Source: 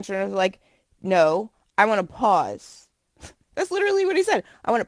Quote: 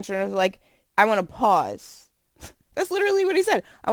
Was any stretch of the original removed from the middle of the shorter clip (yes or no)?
yes